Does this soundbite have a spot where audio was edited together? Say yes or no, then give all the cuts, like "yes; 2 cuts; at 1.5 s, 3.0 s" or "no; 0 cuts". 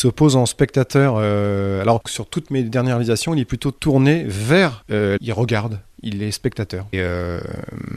yes; 2 cuts; at 5.2 s, 6.9 s